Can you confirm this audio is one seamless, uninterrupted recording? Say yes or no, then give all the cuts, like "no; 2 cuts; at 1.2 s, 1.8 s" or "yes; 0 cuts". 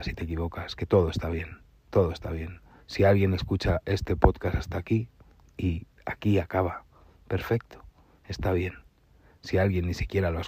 yes; 0 cuts